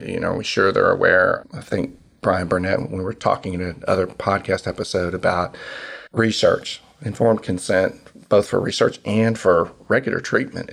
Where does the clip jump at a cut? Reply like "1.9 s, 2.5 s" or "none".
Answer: 6.1 s